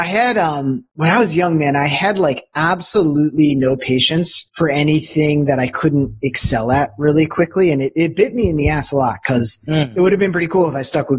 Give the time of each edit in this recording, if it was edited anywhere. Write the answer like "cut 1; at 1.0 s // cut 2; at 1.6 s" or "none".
cut 1; at 4.5 s

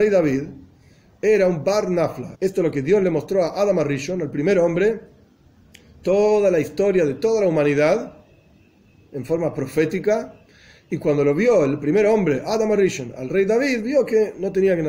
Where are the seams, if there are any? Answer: cut 1; at 2.4 s

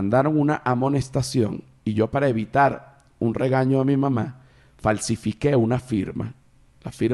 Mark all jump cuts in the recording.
none

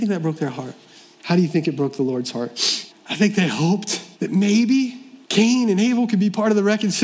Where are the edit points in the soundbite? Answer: cut 1; at 2.9 s // cut 2; at 4.1 s // cut 3; at 5.2 s

